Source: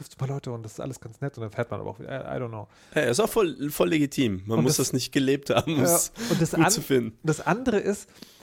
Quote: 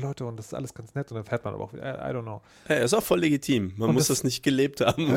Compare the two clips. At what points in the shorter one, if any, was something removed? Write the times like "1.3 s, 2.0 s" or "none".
3.0 s